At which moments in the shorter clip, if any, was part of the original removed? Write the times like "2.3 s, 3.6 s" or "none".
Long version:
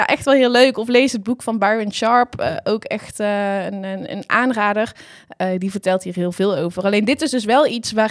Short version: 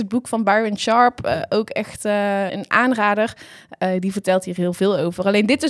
2.5 s